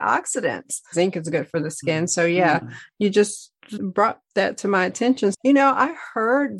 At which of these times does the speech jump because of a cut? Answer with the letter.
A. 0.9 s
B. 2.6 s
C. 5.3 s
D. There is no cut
A